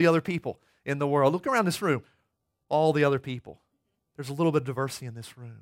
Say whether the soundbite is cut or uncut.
uncut